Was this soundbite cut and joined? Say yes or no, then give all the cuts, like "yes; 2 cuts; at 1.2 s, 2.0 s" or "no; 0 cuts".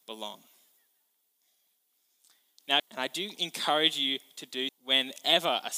yes; 2 cuts; at 2.8 s, 4.7 s